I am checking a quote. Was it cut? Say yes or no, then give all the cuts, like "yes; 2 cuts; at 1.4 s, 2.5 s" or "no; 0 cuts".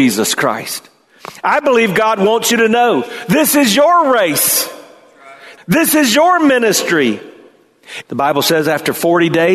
yes; 2 cuts; at 5.6 s, 8.0 s